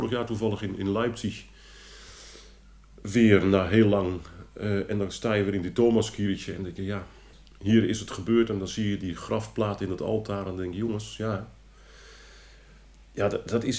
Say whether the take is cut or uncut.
uncut